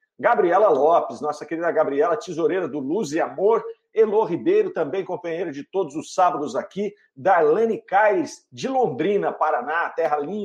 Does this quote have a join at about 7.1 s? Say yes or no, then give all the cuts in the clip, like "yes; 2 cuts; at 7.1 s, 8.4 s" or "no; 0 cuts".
no; 0 cuts